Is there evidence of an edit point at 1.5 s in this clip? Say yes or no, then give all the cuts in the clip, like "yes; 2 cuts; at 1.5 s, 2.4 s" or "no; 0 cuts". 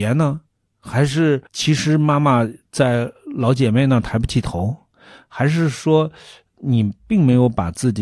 yes; 1 cut; at 1.5 s